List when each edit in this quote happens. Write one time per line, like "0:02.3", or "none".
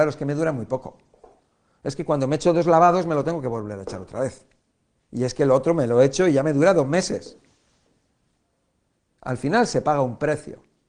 none

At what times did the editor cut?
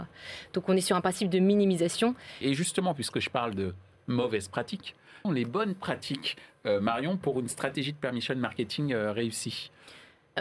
0:02.4
0:05.2

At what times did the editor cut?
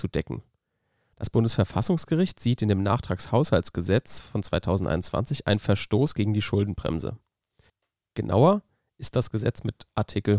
0:01.1

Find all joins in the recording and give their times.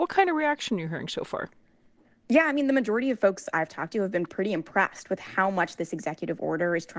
none

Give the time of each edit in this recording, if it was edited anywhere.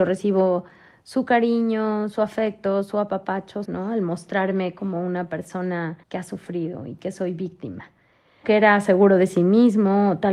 0:03.6
0:06.0
0:08.4

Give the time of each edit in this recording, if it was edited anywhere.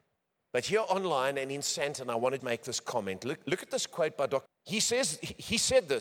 0:02.4
0:04.5

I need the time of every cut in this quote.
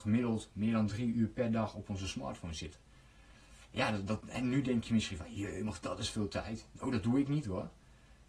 none

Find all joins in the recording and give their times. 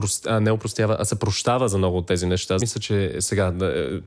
0:02.6

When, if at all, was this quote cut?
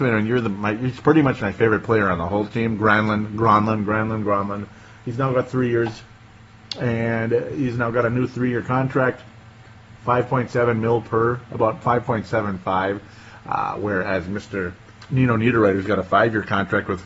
none

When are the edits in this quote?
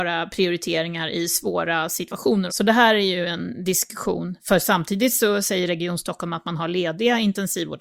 0:02.5

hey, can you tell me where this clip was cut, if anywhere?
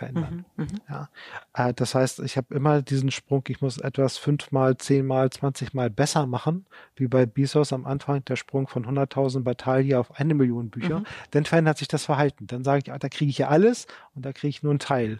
none

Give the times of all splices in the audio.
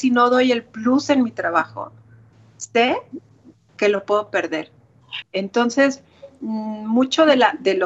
0:05.2

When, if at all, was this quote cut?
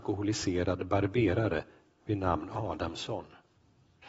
none

